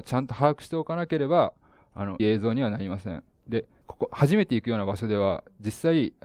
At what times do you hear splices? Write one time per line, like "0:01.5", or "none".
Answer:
0:02.2
0:03.8